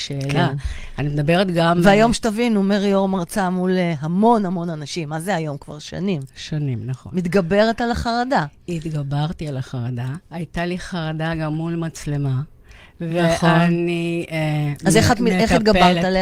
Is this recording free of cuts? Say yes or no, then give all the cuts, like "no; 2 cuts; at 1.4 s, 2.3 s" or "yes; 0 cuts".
no; 1 cut; at 10.2 s